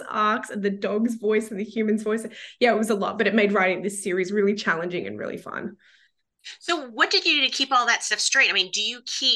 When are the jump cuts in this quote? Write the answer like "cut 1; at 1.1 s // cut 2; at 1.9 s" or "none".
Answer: none